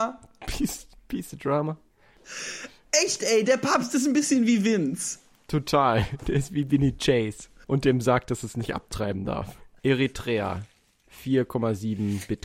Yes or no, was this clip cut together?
yes